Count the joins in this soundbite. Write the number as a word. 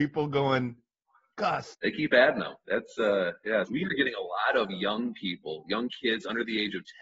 two